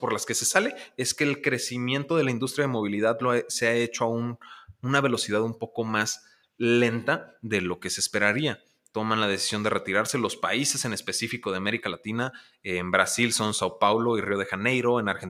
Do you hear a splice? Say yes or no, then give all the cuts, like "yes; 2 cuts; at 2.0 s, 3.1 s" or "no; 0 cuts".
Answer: no; 0 cuts